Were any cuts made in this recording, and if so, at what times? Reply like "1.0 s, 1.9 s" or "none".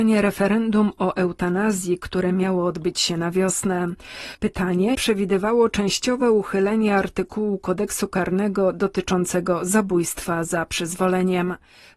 4.9 s